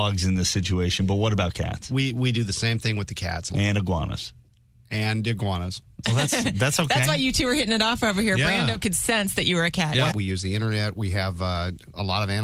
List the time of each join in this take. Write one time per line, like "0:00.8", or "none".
0:03.5
0:06.0
0:10.1